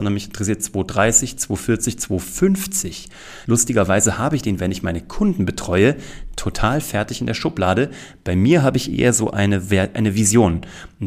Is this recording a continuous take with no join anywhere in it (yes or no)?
no